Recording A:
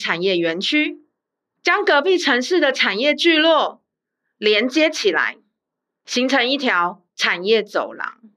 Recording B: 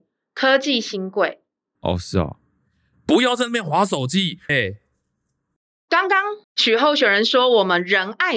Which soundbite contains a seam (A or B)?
B